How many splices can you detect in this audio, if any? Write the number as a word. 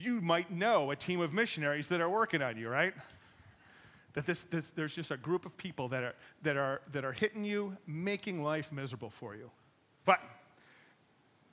one